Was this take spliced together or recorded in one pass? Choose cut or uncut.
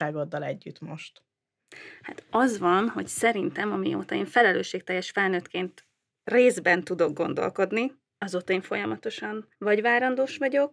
cut